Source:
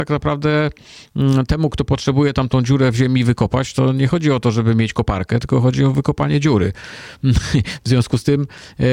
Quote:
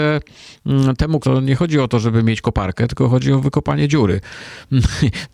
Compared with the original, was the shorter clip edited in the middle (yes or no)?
yes